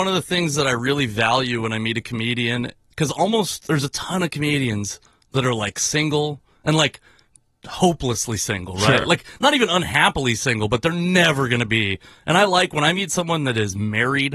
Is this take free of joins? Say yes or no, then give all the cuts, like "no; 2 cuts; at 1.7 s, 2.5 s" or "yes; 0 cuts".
yes; 0 cuts